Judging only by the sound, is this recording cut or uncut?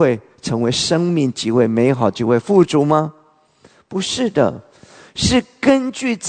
uncut